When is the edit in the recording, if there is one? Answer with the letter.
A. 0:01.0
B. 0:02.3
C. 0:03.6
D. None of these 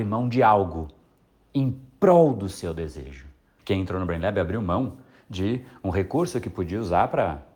C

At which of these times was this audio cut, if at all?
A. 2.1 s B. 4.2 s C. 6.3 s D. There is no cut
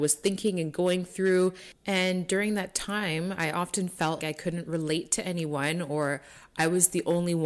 B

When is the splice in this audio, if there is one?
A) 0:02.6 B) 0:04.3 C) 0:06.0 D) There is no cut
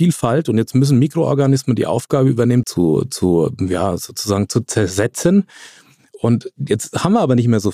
A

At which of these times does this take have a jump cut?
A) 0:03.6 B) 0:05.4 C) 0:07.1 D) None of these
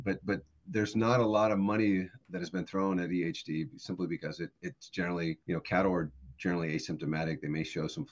B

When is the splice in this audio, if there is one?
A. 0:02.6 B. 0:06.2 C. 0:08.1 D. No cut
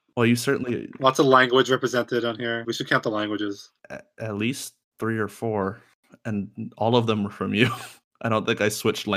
A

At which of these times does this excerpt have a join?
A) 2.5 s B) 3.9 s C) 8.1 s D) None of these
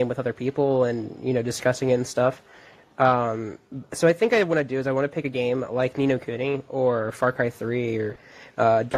D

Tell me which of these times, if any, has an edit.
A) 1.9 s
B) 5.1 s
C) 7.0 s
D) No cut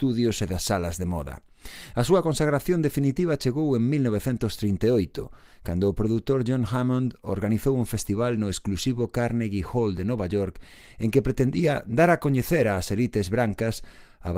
D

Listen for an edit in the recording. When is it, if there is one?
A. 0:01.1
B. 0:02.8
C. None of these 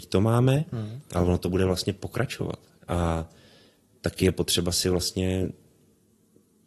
B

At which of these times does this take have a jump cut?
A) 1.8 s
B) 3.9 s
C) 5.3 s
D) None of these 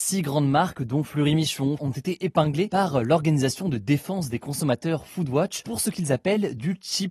A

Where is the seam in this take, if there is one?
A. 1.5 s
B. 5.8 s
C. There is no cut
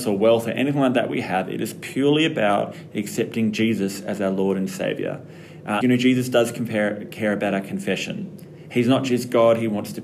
B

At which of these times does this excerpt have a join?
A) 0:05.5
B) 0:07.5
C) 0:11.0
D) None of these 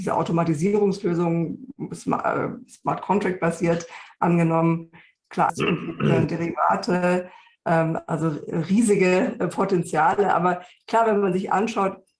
A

